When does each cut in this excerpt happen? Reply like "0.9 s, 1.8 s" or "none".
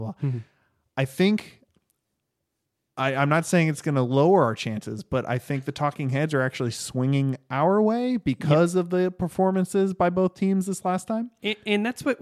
none